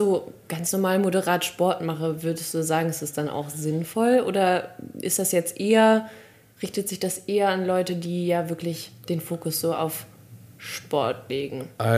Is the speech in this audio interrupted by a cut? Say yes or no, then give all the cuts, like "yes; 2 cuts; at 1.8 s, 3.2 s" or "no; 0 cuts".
no; 0 cuts